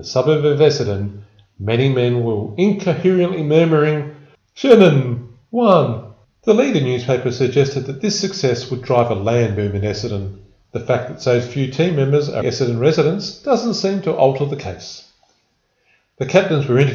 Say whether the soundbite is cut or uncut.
cut